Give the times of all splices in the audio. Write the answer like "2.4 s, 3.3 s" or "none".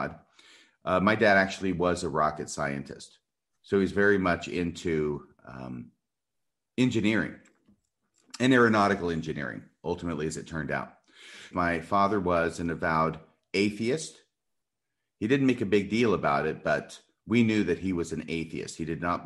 11.5 s